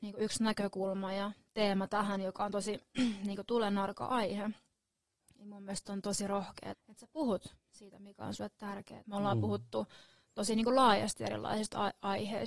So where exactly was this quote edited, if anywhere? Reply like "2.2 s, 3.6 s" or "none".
6.7 s, 9.0 s

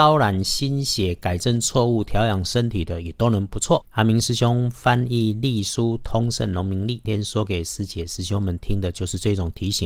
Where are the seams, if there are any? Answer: 3.8 s, 7.0 s

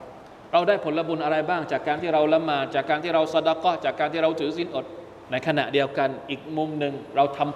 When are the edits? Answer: 5.2 s

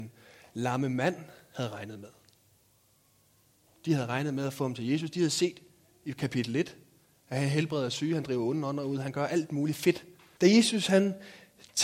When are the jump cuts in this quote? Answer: 10.4 s

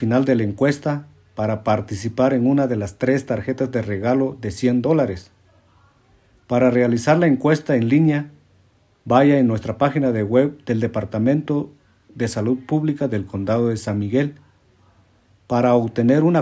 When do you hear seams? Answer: none

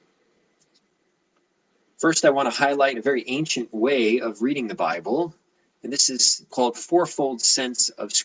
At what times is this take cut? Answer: 1.9 s, 6.5 s

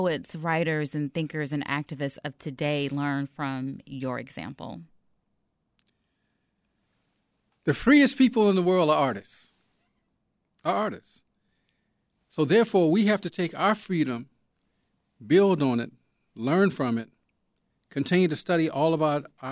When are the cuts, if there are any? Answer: none

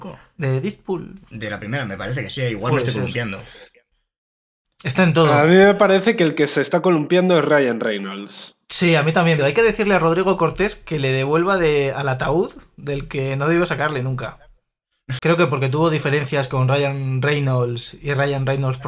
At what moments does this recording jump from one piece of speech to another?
9.4 s, 15.2 s

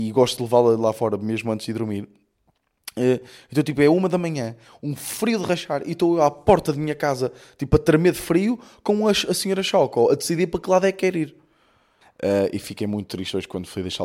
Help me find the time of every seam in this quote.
12.0 s

